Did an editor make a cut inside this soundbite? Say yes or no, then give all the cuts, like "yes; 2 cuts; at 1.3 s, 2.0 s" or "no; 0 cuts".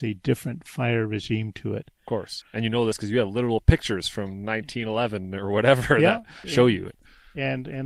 yes; 2 cuts; at 2.4 s, 6.4 s